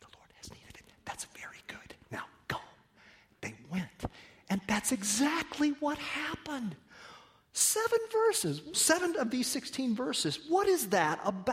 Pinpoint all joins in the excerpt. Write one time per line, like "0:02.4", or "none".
0:08.7